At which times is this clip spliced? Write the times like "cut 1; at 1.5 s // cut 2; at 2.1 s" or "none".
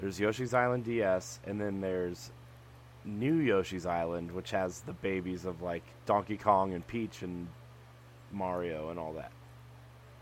none